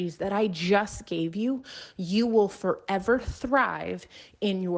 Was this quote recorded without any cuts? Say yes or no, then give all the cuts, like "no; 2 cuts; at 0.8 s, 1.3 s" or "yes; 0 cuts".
yes; 0 cuts